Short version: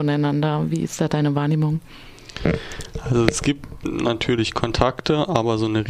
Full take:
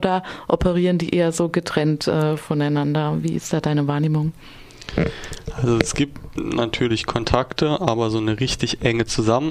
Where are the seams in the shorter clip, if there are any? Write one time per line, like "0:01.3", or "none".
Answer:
none